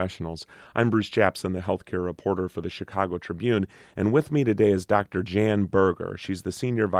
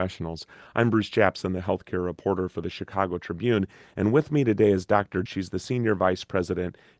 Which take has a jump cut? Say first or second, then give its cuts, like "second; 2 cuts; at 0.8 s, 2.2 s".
second; 1 cut; at 5.3 s